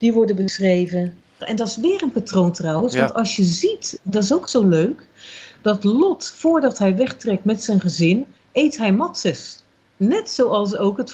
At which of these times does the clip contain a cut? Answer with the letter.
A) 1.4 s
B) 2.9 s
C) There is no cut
A